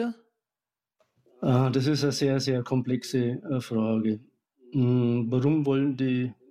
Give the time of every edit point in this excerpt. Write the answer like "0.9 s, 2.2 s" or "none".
none